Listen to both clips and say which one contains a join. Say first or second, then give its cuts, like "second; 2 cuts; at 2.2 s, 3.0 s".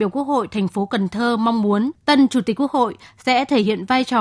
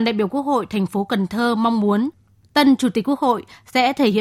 first; 1 cut; at 2.0 s